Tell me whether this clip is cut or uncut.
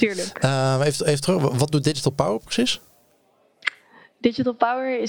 uncut